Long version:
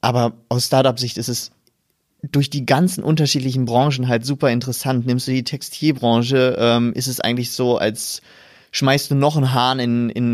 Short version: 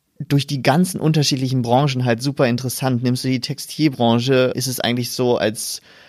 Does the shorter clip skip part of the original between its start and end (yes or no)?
yes